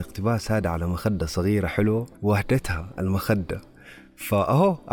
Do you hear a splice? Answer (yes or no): yes